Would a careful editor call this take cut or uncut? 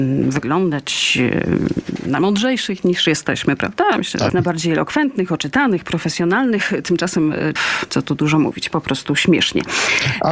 cut